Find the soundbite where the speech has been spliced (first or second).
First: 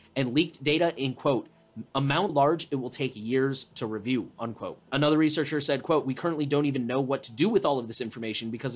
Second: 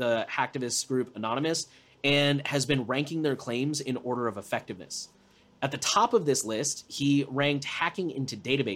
first